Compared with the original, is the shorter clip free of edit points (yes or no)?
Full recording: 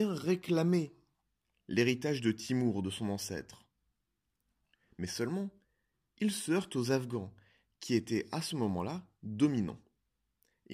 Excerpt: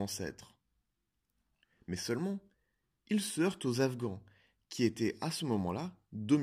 yes